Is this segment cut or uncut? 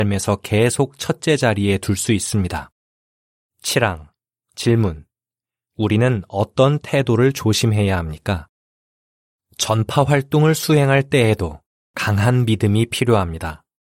uncut